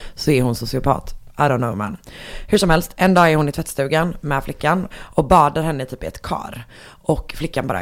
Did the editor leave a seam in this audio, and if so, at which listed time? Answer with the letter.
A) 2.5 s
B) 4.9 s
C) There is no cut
B